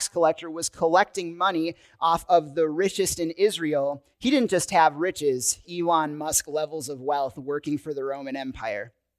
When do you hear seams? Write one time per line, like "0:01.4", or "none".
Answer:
0:04.1
0:05.6